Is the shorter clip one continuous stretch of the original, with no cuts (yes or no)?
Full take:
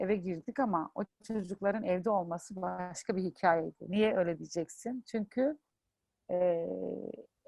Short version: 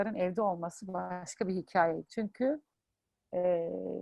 no